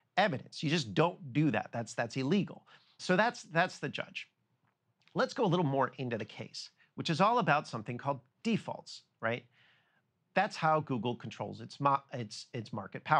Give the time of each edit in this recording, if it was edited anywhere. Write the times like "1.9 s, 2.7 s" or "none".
3.0 s